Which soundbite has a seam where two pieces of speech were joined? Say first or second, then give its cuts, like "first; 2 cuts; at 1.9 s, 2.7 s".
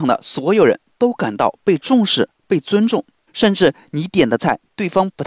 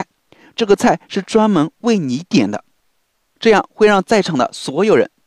first; 1 cut; at 3.3 s